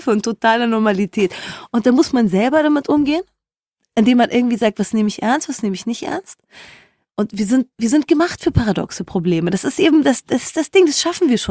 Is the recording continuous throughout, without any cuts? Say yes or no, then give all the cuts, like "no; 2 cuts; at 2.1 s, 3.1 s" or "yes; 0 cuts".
no; 1 cut; at 7.7 s